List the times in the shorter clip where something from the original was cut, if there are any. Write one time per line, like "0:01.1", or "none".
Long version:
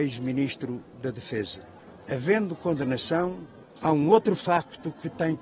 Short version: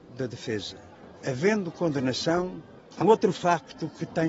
0:03.0